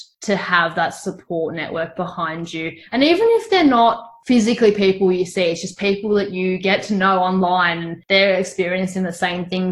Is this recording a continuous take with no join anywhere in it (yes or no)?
yes